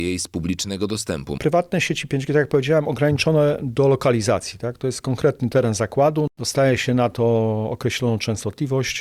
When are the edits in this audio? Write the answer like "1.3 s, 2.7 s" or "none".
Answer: 1.4 s